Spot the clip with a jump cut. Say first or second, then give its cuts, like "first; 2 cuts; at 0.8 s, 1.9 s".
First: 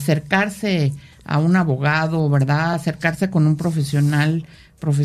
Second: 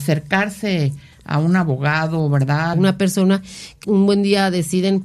second; 2 cuts; at 2.7 s, 3.8 s